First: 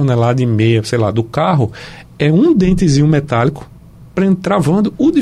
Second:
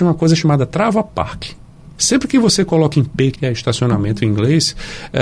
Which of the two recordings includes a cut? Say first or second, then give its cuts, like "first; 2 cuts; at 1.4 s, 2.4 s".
second; 2 cuts; at 1.9 s, 3.3 s